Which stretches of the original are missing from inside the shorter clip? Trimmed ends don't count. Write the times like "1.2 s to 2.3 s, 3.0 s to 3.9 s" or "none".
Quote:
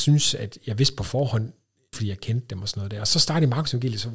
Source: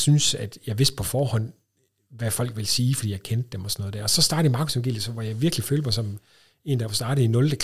1.9 s to 3.0 s